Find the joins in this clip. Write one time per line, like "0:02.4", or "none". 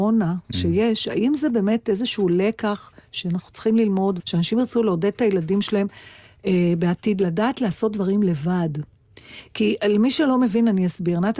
0:04.2